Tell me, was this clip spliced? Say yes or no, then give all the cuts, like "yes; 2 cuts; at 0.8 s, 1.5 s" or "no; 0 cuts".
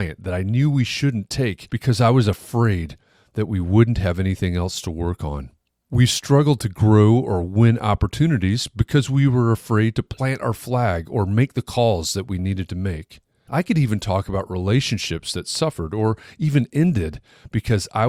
no; 0 cuts